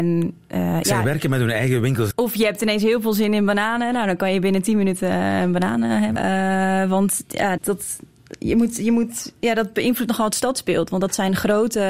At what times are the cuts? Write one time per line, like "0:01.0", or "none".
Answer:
0:02.1
0:06.2
0:07.6